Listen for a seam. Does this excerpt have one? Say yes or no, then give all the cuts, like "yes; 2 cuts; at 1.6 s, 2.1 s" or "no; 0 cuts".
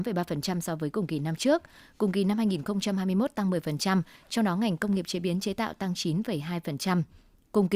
no; 0 cuts